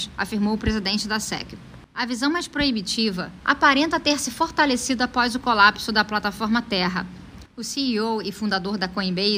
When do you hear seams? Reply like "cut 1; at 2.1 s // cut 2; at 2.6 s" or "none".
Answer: cut 1; at 1.8 s // cut 2; at 3.4 s // cut 3; at 7.5 s